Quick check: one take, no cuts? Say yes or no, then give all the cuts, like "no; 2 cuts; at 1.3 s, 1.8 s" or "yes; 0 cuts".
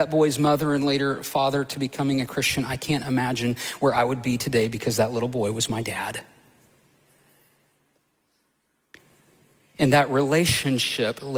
yes; 0 cuts